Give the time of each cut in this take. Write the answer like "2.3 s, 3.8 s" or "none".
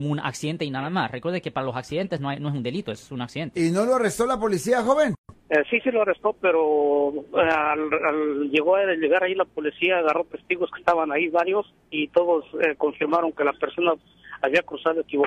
5.4 s